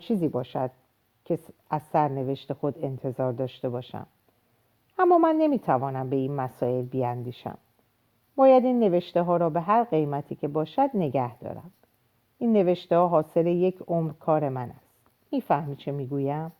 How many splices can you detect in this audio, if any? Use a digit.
0